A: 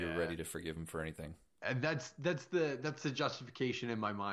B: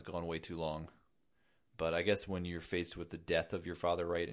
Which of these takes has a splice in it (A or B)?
A